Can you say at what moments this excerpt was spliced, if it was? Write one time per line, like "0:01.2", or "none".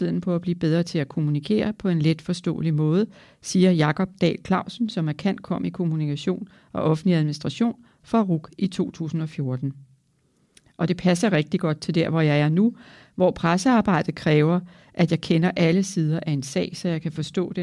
none